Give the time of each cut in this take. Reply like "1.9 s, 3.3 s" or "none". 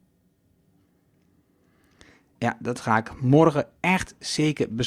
2.4 s